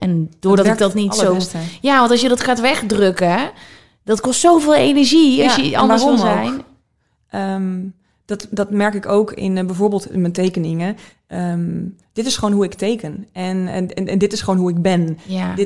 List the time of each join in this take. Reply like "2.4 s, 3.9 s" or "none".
none